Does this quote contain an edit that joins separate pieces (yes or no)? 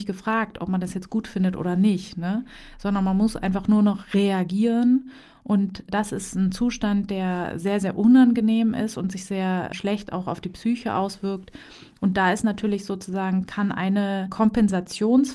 no